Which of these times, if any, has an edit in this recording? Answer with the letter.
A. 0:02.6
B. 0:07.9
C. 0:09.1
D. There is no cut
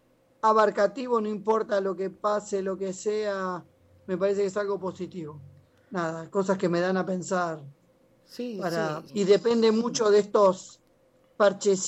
C